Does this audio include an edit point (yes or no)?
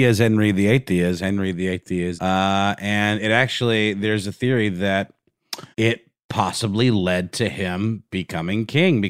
yes